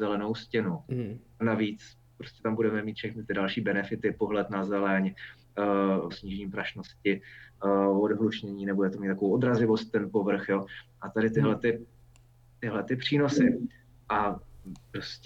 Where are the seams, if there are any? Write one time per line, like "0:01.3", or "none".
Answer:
0:01.4
0:06.1